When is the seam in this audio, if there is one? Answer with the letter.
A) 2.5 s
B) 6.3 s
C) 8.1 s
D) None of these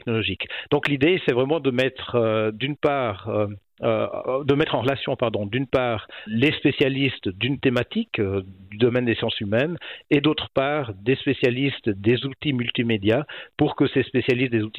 B